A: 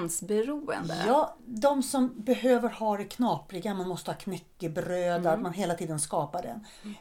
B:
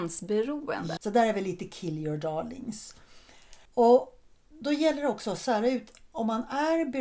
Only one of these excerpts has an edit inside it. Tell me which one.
B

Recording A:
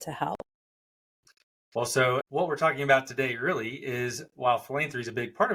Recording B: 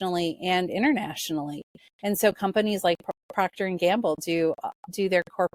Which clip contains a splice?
A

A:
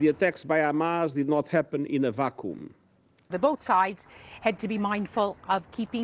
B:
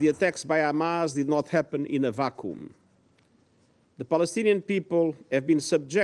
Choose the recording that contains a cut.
A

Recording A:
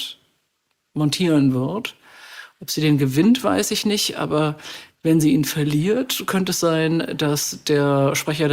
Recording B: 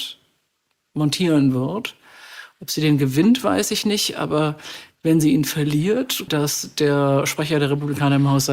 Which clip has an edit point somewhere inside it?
B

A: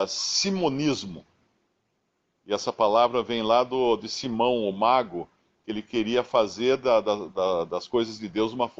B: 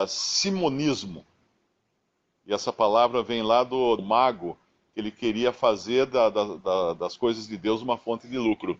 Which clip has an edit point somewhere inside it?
B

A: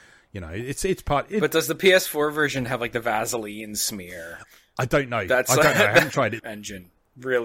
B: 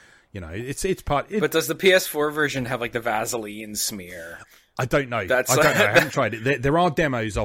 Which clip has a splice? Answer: A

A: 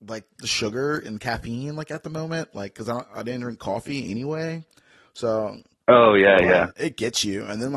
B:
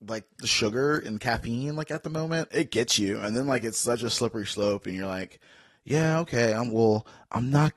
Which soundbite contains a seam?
B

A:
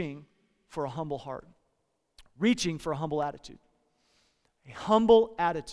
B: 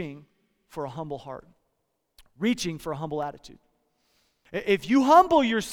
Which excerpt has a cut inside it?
B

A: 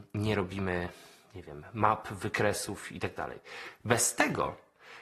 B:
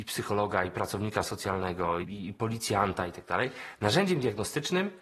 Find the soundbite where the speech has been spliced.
B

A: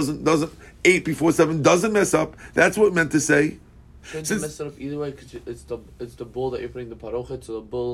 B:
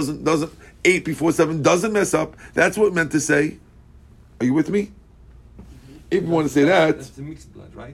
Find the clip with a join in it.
A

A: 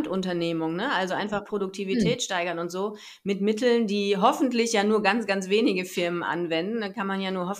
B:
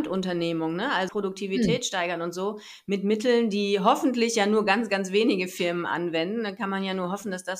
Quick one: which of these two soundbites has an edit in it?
B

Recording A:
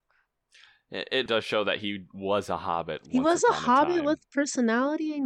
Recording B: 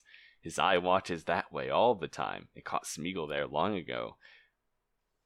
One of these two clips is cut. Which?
A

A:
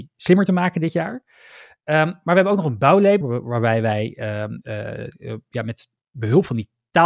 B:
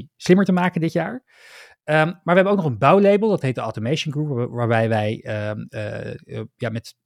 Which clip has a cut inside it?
A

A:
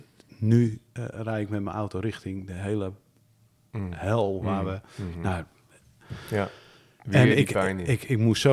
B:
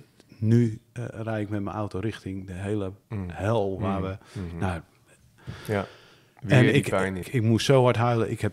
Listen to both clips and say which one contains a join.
B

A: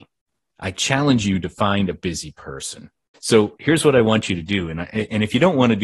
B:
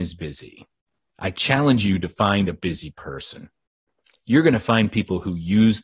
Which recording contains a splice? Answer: A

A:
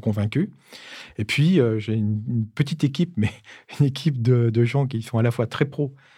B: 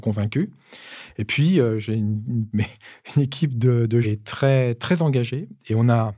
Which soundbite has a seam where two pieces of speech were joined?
B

